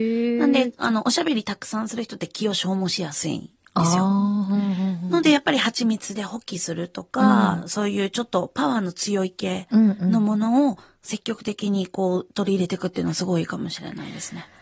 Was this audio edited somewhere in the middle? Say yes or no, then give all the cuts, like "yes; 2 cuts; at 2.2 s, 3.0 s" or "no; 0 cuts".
no; 0 cuts